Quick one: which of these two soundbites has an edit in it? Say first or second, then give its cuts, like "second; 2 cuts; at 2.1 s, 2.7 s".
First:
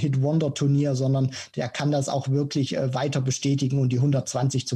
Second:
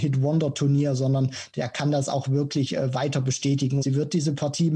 second; 1 cut; at 3.8 s